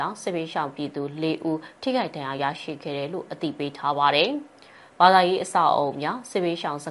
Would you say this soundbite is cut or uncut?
uncut